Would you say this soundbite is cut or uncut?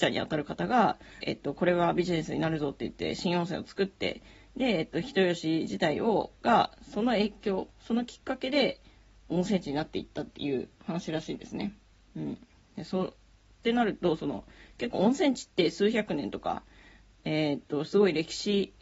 cut